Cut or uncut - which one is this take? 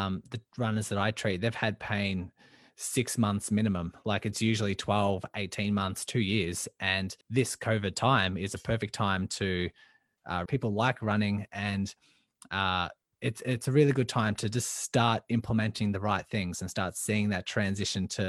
cut